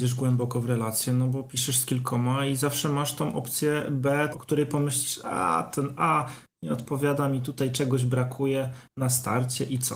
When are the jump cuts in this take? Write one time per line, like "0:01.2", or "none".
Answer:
0:04.3